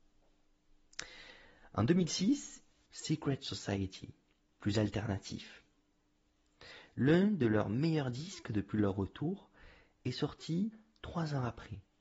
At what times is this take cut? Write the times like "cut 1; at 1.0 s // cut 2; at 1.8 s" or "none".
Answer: cut 1; at 2.9 s // cut 2; at 4.5 s